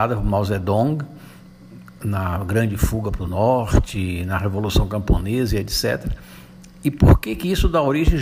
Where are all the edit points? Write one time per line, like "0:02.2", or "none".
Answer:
none